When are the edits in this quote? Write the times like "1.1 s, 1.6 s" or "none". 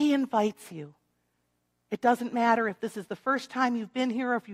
none

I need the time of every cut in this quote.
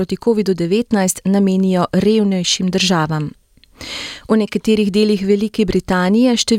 none

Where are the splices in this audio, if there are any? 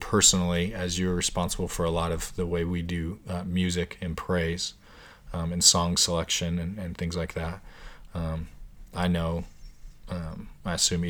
none

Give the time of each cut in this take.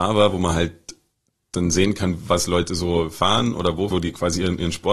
3.9 s

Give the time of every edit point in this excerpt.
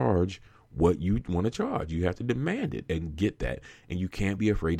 2.9 s

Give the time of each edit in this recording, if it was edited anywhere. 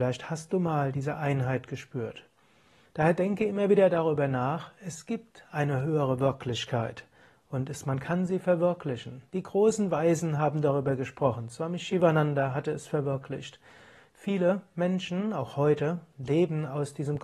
2.8 s

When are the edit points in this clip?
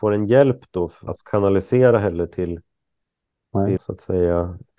1.1 s, 3.8 s

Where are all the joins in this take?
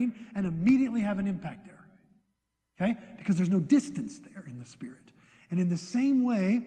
none

